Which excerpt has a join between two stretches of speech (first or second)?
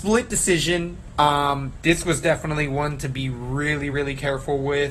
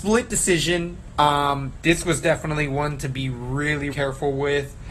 second